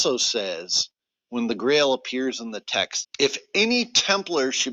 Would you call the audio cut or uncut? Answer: cut